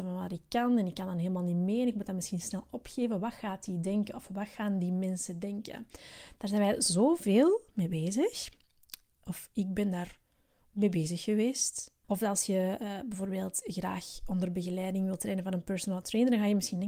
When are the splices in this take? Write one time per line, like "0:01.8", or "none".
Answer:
0:12.0